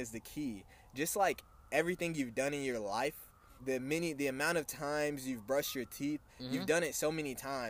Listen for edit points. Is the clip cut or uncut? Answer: cut